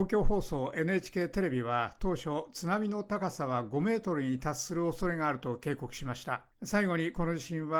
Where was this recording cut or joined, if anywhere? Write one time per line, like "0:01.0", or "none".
0:06.5